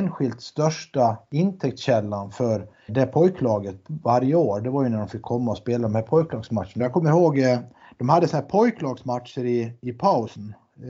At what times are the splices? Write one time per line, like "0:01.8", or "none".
0:02.9
0:06.8

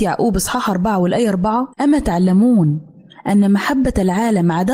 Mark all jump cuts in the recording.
0:01.7

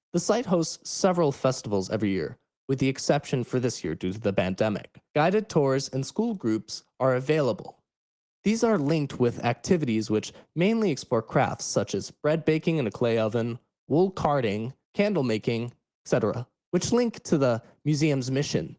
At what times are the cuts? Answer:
0:05.1
0:14.8

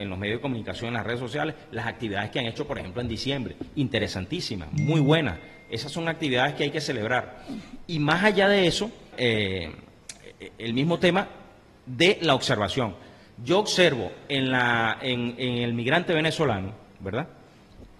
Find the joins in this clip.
0:09.1

